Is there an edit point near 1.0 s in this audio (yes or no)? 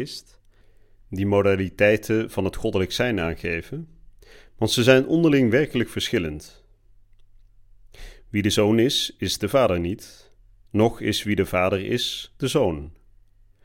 no